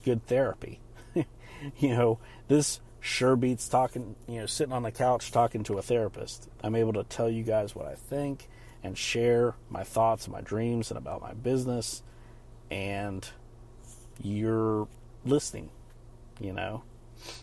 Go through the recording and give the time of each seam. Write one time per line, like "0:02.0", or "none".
0:06.6
0:10.3

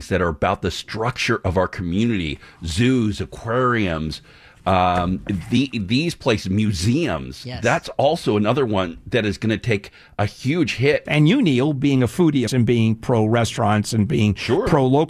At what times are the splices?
0:11.1
0:12.5

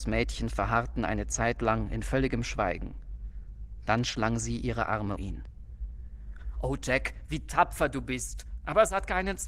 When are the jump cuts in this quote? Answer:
0:05.2

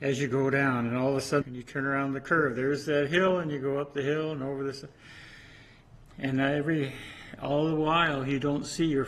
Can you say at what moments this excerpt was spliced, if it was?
0:01.4

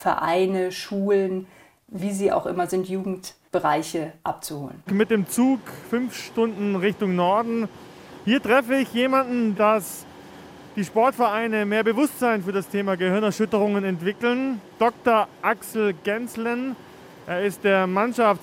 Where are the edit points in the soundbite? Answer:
0:04.9
0:09.5

